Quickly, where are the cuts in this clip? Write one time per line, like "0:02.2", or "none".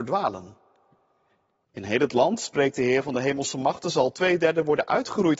0:01.6